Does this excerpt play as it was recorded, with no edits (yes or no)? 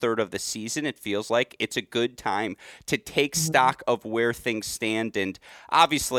yes